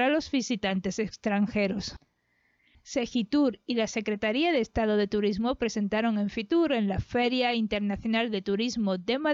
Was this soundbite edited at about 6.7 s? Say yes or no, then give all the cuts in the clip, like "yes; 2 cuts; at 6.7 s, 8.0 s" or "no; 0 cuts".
no; 0 cuts